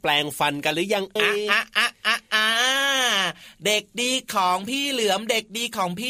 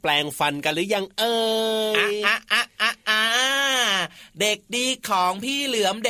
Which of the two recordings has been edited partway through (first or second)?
first